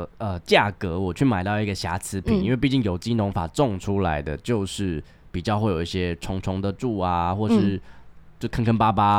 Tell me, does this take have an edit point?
no; 0 cuts

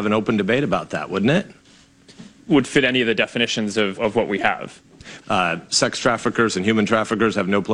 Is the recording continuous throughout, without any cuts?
no; 3 cuts; at 2.4 s, 4.0 s, 5.2 s

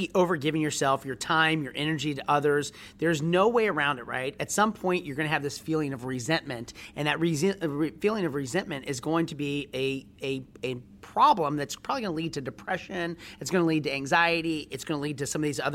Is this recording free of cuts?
yes; 0 cuts

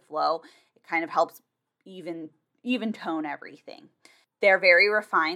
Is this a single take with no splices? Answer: yes; 0 cuts

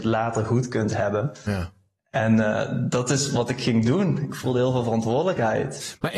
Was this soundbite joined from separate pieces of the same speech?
no; 0 cuts

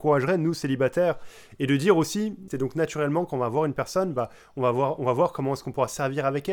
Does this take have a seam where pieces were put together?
yes; 1 cut; at 2.5 s

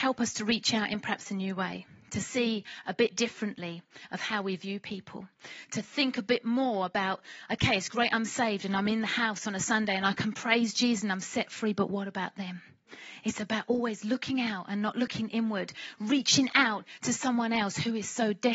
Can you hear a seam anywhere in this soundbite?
no; 0 cuts

